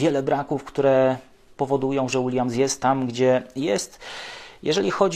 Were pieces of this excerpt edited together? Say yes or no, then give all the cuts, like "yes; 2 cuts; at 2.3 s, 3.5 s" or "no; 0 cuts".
no; 0 cuts